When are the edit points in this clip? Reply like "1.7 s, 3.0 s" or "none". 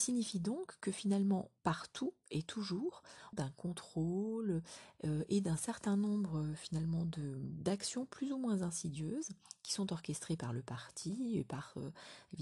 1.6 s, 3.3 s